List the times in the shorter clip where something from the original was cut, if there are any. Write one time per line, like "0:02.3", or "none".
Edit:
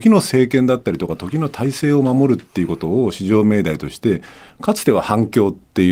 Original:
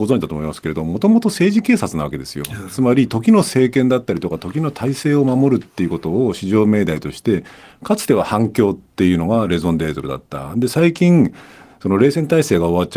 none